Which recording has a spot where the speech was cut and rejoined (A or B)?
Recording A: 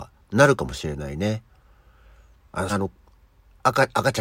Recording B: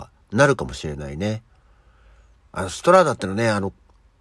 A